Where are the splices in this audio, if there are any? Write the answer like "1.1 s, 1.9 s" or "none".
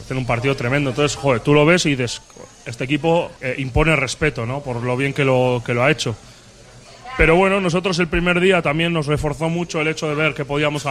3.4 s